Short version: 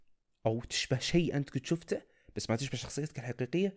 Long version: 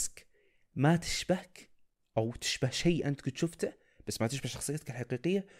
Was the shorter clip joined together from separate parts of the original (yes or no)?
no